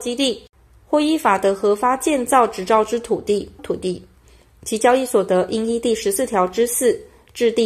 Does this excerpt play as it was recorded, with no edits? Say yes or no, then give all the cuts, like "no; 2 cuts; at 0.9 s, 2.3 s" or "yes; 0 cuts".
no; 1 cut; at 3.6 s